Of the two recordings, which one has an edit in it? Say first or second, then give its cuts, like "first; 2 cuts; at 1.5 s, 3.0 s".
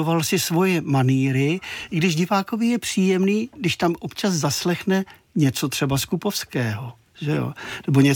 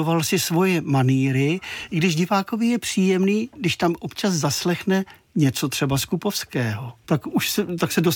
second; 1 cut; at 7.0 s